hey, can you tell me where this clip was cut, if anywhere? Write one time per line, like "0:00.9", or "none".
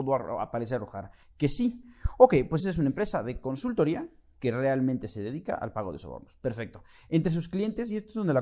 0:02.6